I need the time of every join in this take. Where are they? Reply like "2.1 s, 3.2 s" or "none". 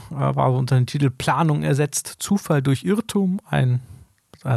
none